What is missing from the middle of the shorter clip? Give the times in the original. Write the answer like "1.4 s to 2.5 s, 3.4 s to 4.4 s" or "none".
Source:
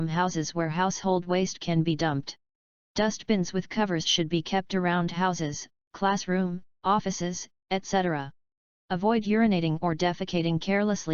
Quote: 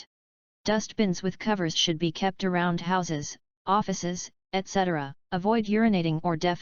5.8 s to 6.7 s, 8.4 s to 8.8 s